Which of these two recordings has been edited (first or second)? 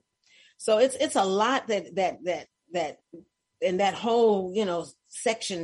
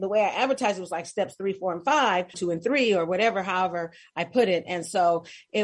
second